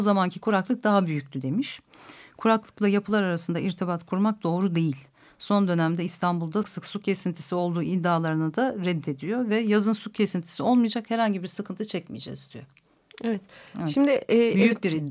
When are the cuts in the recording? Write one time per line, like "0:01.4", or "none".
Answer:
0:06.6